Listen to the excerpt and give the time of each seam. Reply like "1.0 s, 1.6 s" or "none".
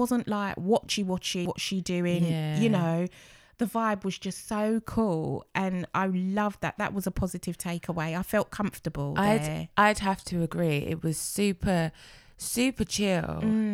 1.5 s